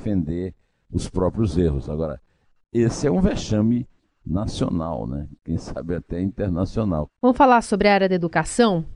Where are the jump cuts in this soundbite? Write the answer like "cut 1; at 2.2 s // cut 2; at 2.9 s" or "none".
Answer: cut 1; at 7.1 s